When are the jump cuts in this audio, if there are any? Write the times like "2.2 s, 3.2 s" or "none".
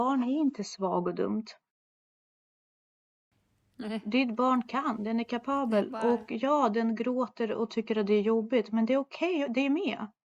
none